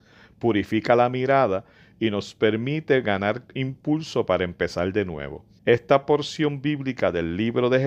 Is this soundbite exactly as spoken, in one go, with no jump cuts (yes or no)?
no